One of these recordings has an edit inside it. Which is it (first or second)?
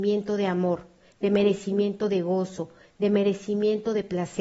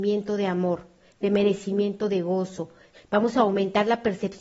second